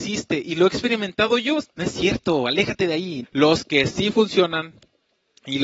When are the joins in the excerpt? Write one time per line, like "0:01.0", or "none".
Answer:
0:01.6
0:03.2